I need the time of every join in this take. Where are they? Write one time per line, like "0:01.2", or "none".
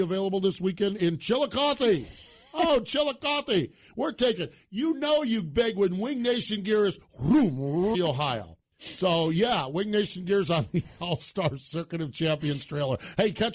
0:07.9